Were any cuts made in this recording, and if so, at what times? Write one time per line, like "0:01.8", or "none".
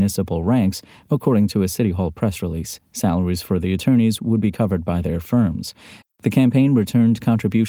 0:06.0